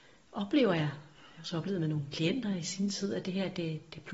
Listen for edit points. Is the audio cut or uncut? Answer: uncut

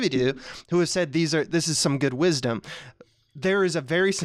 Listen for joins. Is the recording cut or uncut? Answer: uncut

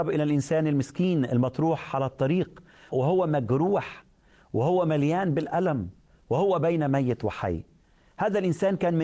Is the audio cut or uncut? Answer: cut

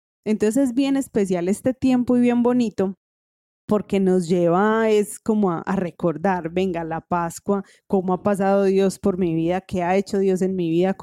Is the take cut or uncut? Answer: cut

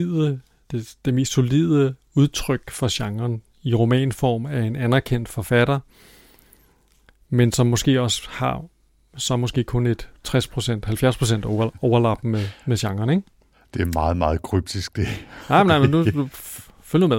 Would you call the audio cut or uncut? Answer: uncut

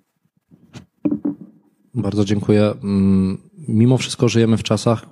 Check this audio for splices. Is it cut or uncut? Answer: uncut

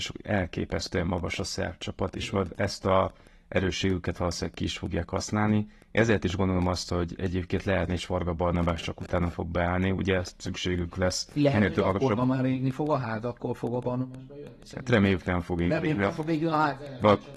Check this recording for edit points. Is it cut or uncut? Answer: cut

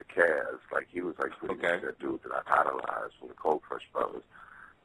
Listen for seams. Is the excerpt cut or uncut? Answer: uncut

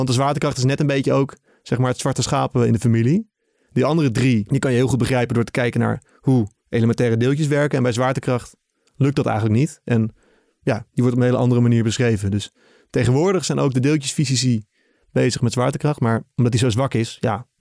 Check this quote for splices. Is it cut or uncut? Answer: uncut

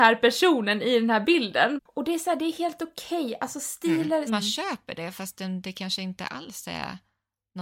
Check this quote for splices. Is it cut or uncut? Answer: cut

